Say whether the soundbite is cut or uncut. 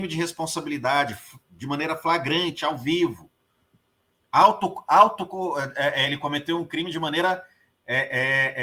cut